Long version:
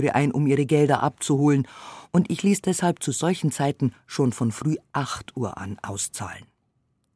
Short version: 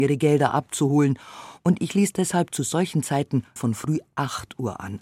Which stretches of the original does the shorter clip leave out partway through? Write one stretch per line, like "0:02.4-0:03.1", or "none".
0:04.0-0:04.3